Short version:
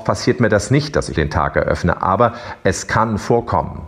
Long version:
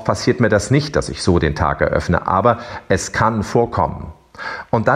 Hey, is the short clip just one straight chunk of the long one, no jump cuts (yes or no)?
no